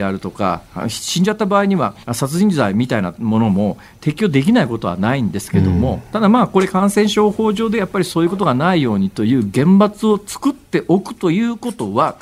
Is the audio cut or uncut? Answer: cut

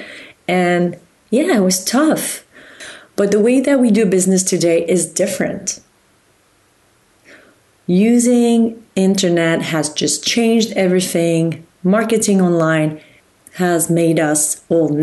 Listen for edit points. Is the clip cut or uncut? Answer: uncut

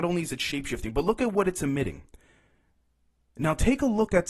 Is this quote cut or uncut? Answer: uncut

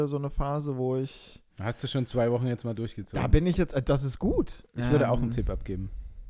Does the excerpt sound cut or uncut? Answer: cut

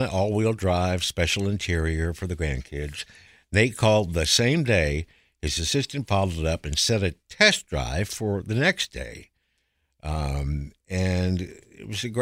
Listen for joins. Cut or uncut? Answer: uncut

